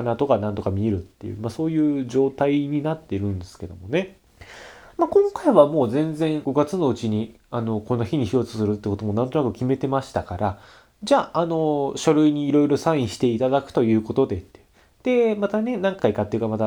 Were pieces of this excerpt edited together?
no; 0 cuts

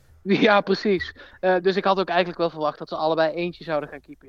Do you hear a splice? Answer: no; 0 cuts

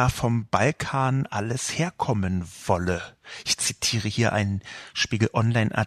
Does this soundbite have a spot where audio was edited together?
no; 0 cuts

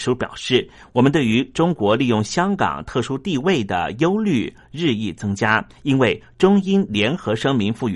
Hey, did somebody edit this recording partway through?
no; 0 cuts

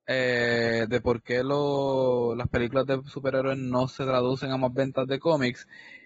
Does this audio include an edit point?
no; 0 cuts

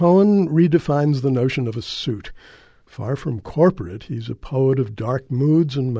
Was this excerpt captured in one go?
yes; 0 cuts

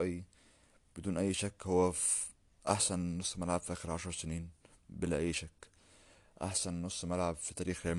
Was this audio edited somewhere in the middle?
no; 0 cuts

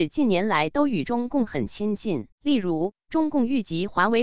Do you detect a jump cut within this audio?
yes; 1 cut; at 2.3 s

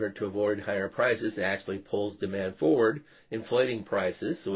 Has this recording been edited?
no; 0 cuts

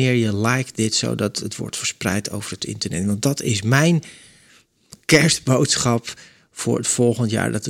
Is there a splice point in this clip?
no; 0 cuts

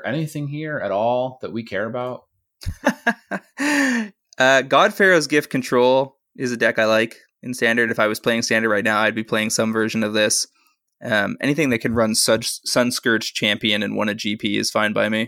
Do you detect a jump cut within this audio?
no; 0 cuts

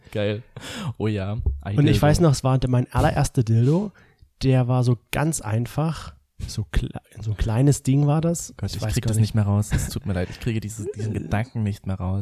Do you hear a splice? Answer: no; 0 cuts

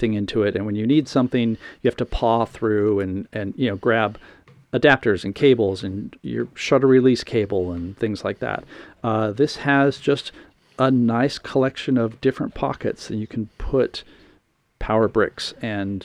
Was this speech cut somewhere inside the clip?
no; 0 cuts

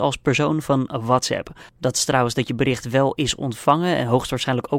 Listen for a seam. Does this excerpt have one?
yes; 1 cut; at 1.7 s

